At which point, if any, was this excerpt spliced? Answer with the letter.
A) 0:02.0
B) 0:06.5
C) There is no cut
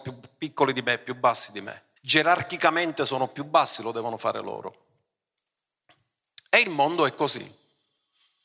A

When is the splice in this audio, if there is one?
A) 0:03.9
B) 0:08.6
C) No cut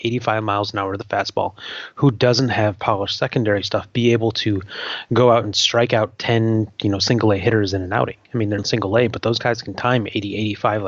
B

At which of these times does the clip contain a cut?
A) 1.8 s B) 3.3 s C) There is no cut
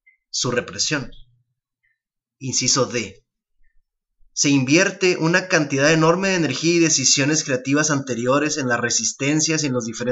C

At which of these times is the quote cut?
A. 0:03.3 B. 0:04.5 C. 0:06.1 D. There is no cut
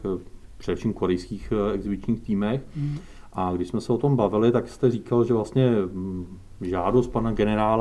D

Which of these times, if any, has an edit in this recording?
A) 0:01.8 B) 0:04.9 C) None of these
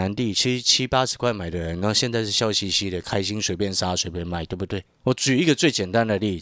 B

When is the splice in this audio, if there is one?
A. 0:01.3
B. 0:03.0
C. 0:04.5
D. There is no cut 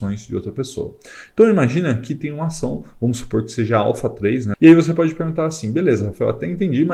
C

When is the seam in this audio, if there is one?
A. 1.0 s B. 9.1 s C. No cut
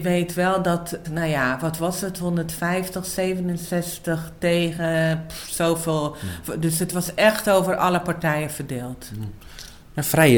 A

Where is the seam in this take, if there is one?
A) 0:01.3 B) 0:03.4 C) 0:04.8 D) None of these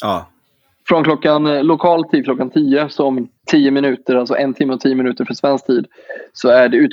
B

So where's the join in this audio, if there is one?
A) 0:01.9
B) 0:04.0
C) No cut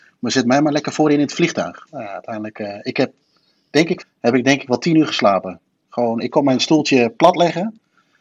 B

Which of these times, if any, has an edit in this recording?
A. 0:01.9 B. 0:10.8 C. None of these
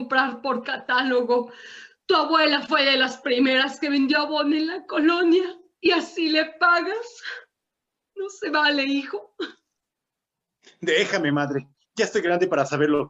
C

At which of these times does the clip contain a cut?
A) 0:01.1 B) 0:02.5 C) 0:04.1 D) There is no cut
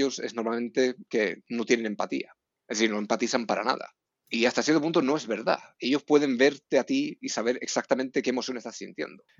A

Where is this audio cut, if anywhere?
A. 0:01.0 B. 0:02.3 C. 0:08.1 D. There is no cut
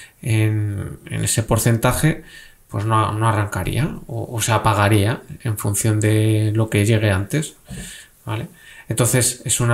D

